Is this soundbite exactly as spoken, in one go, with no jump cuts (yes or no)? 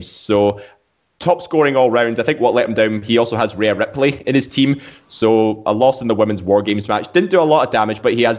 yes